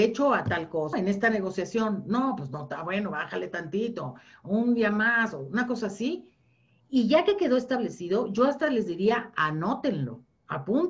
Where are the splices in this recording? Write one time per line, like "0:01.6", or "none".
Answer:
0:00.9

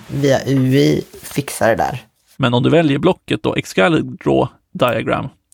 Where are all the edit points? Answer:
0:02.3

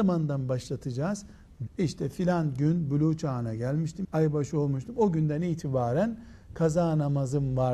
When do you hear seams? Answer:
0:01.7
0:04.0

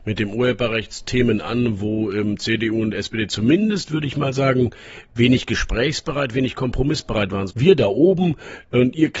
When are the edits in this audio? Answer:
0:07.5

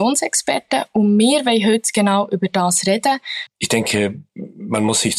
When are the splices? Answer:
0:03.5

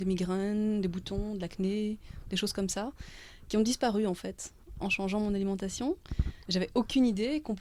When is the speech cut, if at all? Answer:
0:06.5

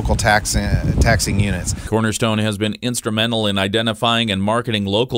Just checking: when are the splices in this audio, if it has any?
none

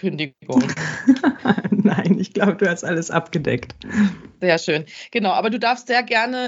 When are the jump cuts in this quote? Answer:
none

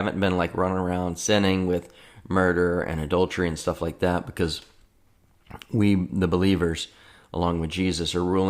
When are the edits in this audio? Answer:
none

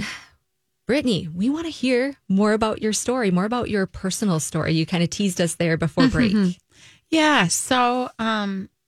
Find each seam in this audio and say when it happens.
none

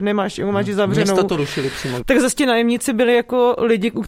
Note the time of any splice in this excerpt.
0:02.0

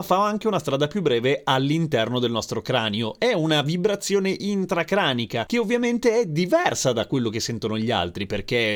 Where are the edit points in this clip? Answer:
none

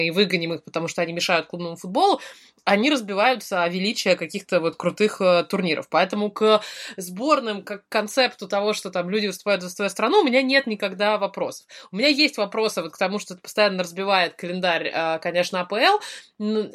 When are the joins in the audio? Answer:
none

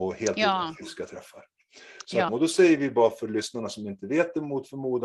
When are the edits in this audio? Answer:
0:02.3

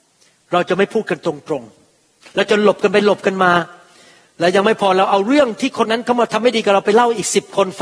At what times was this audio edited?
0:05.8

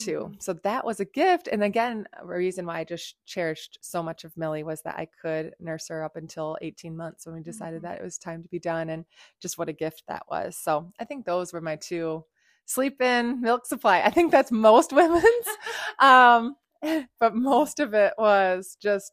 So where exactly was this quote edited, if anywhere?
0:17.2

